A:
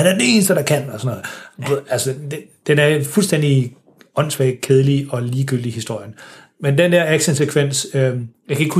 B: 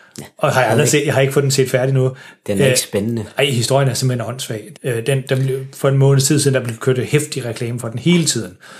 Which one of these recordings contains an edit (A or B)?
B